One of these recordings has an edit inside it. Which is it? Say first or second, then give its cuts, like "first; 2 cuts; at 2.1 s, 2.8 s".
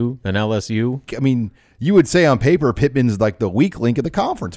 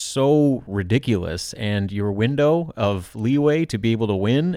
first; 1 cut; at 1.1 s